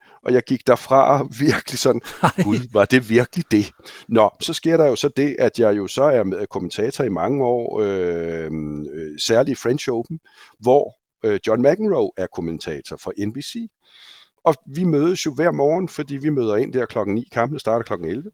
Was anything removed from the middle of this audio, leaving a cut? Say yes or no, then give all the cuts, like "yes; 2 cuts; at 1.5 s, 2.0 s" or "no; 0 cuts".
no; 0 cuts